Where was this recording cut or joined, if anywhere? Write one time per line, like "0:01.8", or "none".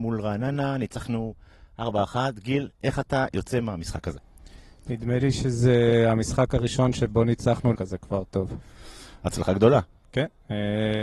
0:07.7